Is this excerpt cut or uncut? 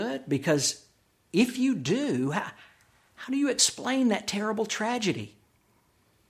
uncut